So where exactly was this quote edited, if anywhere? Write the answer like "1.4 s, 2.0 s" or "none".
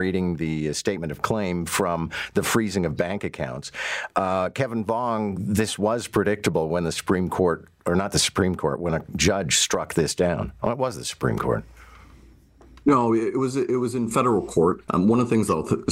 14.8 s